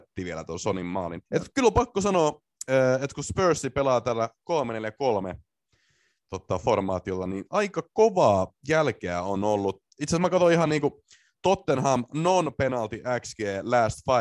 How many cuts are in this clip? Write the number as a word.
one